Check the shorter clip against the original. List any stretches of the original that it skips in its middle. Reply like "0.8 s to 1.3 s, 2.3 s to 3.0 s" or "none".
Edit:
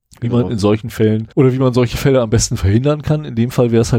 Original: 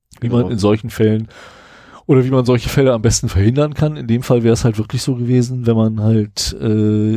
1.3 s to 2.0 s